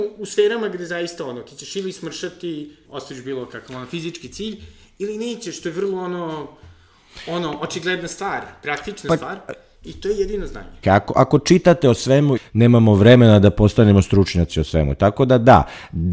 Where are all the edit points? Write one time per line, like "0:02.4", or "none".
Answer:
0:02.8
0:10.8
0:12.4